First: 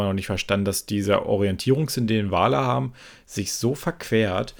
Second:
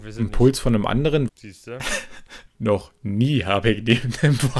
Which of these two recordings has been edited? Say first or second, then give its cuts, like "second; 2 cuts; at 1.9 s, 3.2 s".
second; 2 cuts; at 1.3 s, 2.5 s